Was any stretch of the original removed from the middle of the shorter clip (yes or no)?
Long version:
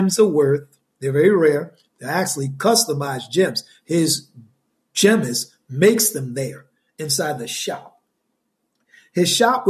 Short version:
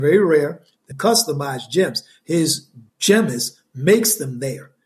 yes